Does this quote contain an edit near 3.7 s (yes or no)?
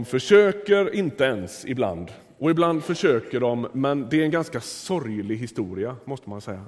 yes